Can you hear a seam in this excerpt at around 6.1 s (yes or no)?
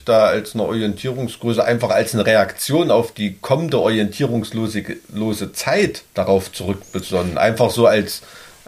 yes